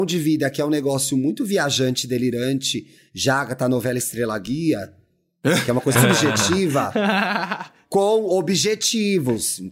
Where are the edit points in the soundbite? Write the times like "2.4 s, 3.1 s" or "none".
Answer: 5.9 s